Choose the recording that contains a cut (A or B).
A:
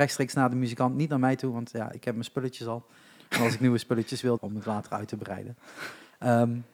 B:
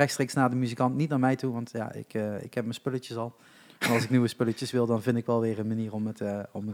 A